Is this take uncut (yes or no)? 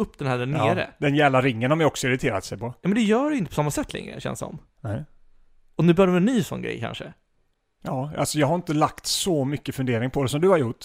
yes